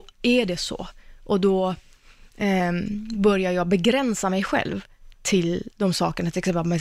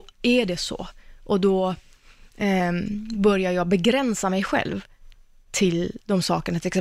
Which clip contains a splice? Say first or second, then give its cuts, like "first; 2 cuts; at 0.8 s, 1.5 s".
first; 1 cut; at 5.2 s